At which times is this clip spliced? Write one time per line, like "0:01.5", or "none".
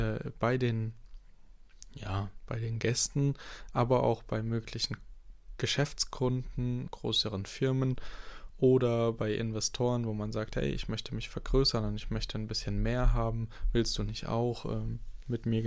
0:06.9